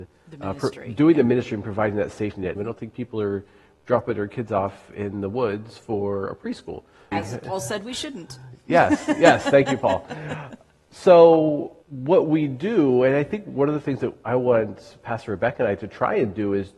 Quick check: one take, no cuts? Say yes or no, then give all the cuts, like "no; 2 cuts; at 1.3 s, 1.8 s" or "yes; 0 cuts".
no; 3 cuts; at 2.5 s, 7.1 s, 11.8 s